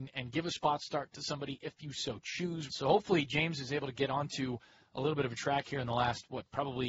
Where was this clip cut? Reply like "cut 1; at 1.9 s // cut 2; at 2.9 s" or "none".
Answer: cut 1; at 2.7 s